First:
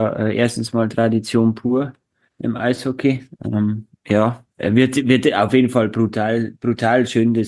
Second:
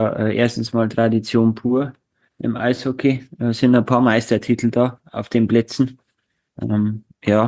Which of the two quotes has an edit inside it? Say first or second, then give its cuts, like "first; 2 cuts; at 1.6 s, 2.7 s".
first; 2 cuts; at 3.4 s, 4.5 s